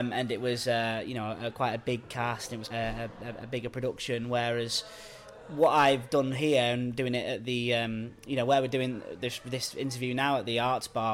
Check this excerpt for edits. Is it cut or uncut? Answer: cut